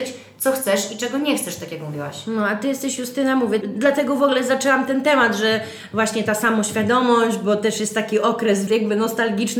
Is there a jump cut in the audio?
yes; 2 cuts; at 3.6 s, 8.7 s

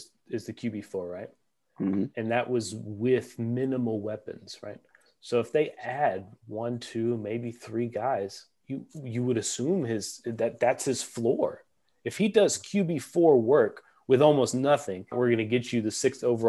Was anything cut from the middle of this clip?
yes; 1 cut; at 15.1 s

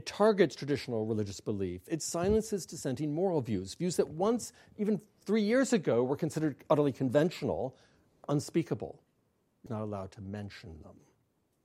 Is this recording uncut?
no; 2 cuts; at 8.2 s, 9.7 s

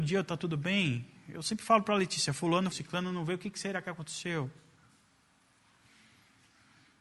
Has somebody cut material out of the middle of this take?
yes; 1 cut; at 2.7 s

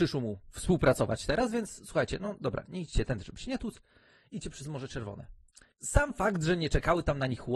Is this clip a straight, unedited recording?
yes; 0 cuts

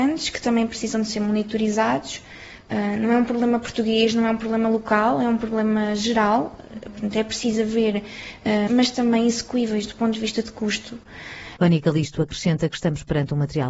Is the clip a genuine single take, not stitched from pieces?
no; 2 cuts; at 8.7 s, 11.6 s

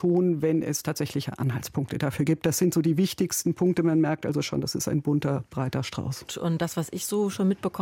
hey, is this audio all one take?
no; 1 cut; at 6.3 s

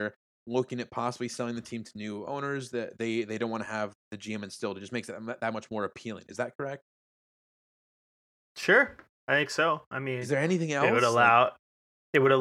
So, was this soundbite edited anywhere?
no; 0 cuts

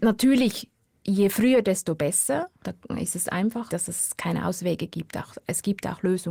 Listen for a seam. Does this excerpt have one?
yes; 2 cuts; at 2.6 s, 3.7 s

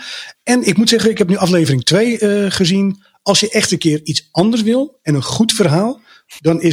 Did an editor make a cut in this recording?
no; 0 cuts

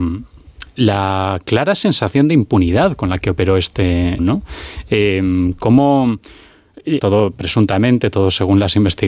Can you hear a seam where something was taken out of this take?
yes; 2 cuts; at 4.2 s, 7.0 s

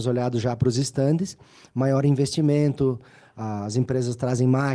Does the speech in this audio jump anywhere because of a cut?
no; 0 cuts

